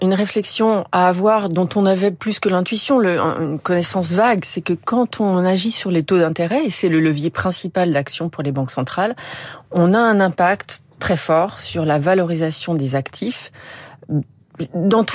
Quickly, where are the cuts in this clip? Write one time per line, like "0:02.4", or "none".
none